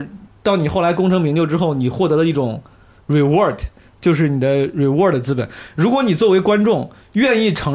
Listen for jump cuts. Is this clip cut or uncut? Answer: uncut